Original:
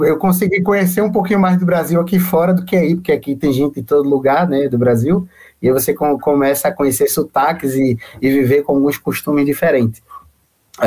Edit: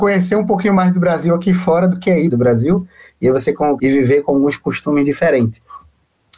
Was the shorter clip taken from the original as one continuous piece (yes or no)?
no